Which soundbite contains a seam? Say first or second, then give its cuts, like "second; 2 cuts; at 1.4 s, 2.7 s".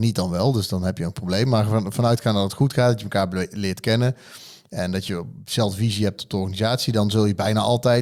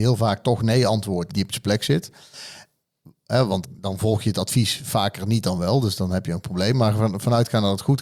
second; 2 cuts; at 1.3 s, 3.6 s